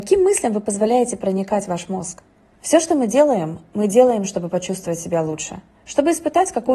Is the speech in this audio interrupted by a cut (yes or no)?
yes